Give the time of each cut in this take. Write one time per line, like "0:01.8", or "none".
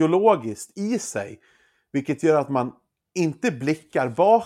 none